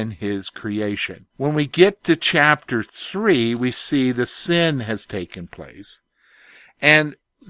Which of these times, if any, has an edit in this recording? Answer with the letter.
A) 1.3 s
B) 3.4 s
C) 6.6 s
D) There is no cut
A